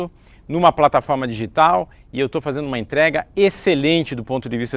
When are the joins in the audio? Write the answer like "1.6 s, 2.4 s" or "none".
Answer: none